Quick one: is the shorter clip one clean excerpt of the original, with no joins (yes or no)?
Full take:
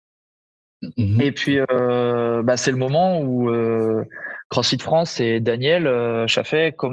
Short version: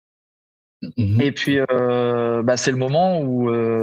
yes